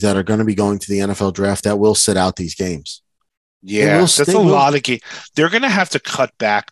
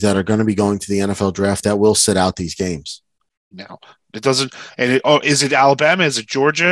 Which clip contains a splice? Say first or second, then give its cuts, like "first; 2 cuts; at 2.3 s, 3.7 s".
second; 1 cut; at 3.5 s